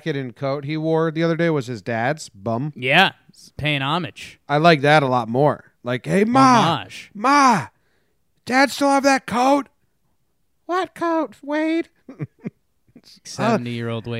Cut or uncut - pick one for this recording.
cut